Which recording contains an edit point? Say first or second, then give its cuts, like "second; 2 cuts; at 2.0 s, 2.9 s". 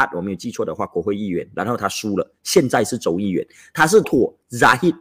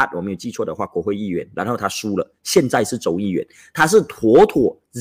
first; 1 cut; at 4.0 s